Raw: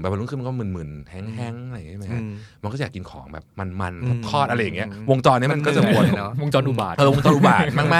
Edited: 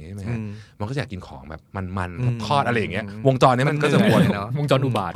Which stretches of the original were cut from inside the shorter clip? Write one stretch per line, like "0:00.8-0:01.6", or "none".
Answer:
none